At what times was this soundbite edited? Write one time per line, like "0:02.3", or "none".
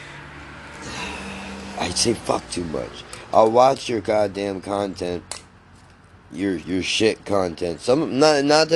none